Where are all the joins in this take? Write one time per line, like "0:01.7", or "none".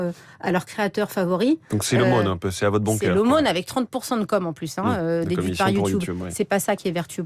none